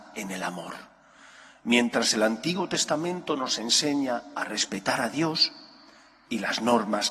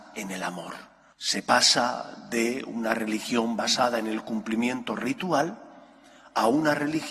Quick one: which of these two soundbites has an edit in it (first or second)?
second